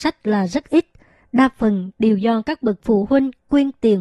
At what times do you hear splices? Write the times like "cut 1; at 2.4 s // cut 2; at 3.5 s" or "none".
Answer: none